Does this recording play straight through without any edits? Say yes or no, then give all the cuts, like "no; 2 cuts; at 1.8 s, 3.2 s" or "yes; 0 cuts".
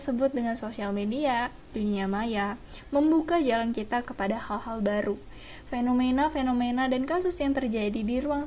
no; 1 cut; at 1.6 s